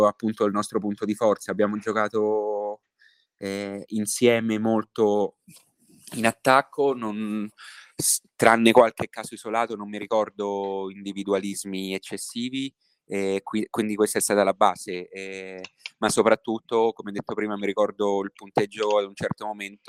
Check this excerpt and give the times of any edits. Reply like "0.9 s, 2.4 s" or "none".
none